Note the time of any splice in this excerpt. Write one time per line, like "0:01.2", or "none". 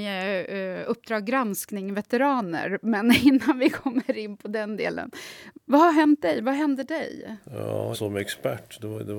0:07.9

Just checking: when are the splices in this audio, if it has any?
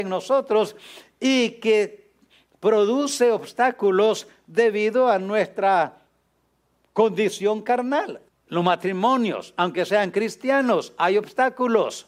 0:08.3

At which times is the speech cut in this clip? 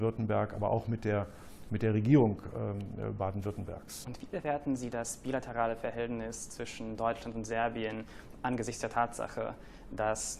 0:04.0

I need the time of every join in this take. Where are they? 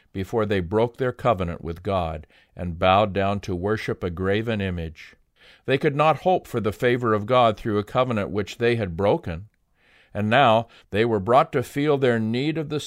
0:10.8

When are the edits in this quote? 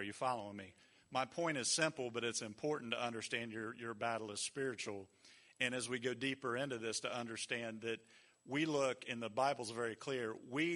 none

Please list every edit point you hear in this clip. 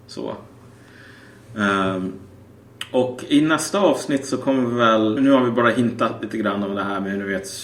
0:05.2

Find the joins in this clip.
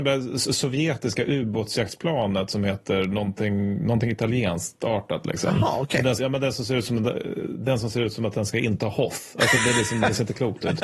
0:06.2
0:09.6

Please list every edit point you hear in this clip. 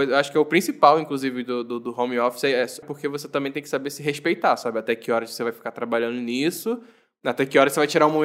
0:02.8

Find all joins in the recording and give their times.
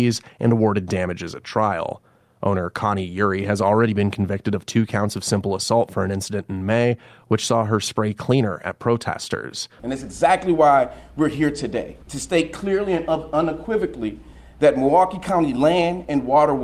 0:09.8
0:12.0

